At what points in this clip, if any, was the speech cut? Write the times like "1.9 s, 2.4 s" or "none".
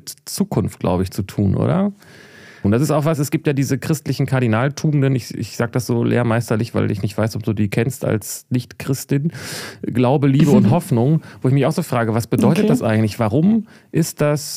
2.6 s